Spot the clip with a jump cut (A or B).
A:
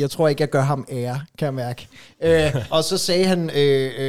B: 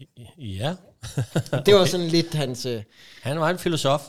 A